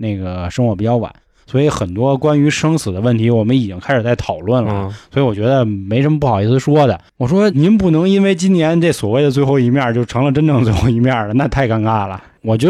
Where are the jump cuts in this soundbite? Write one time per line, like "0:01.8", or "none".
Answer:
0:07.5